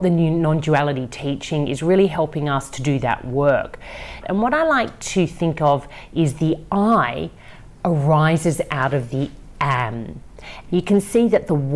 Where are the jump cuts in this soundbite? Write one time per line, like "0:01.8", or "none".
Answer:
0:04.2
0:10.7